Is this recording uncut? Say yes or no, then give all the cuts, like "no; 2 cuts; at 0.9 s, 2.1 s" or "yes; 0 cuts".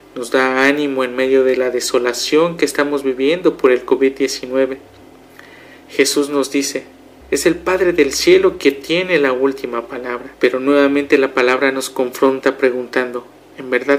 no; 2 cuts; at 7.2 s, 10.3 s